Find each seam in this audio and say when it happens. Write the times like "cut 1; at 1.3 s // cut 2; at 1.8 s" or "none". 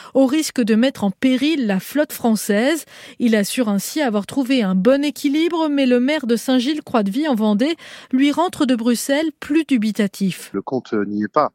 cut 1; at 10.5 s

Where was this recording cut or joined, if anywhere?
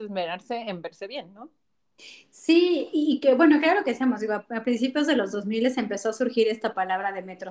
cut 1; at 4.4 s

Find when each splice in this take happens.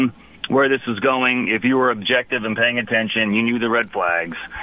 none

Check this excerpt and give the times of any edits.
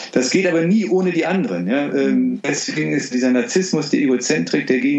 cut 1; at 3.1 s

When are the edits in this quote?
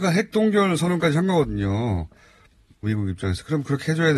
cut 1; at 2.8 s

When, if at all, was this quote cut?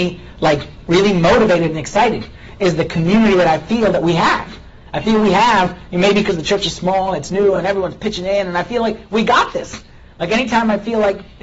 none

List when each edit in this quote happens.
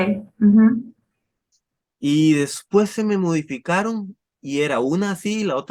none

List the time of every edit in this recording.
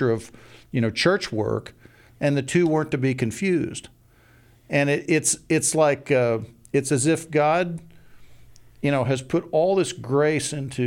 none

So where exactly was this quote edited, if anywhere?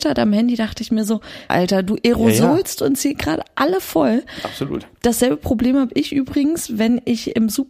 cut 1; at 1.5 s

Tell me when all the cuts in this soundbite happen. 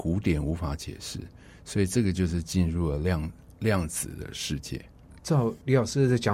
none

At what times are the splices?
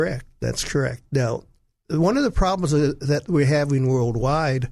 none

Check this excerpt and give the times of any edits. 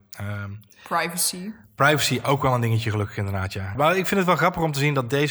cut 1; at 3.7 s

